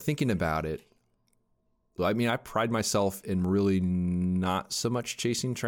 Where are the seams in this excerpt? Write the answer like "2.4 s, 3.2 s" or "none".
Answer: 2.0 s